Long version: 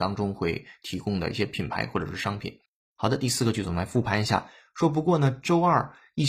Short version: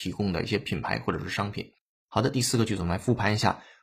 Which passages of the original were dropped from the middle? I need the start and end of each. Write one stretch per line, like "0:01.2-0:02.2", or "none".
none